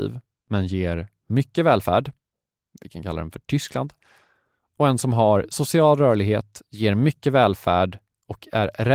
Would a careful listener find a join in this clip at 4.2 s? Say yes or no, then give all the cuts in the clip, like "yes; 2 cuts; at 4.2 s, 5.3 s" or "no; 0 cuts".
no; 0 cuts